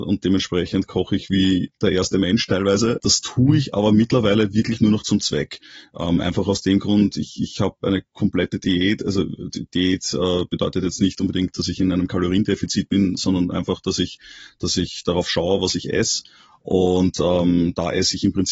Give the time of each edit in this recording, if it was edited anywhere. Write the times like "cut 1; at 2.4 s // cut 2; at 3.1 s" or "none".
cut 1; at 3.0 s